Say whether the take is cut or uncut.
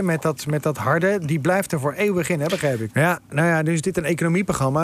cut